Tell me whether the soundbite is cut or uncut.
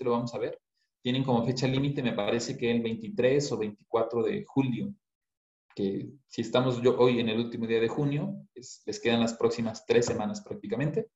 uncut